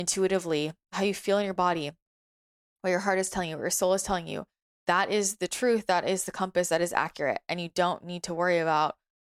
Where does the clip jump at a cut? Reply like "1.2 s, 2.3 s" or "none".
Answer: none